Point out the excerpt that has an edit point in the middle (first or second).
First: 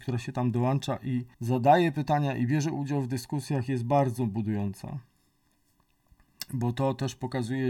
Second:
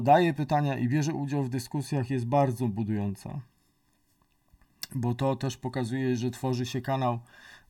first